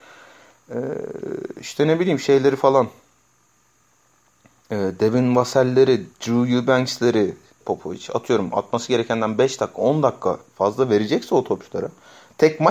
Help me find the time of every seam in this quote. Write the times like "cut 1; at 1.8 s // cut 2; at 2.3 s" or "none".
cut 1; at 7.6 s